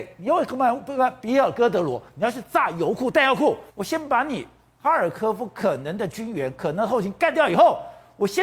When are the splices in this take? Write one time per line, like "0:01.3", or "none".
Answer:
0:03.7